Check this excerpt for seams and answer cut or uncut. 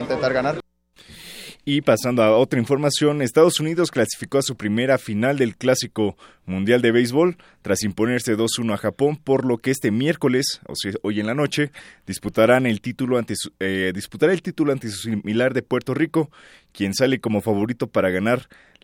uncut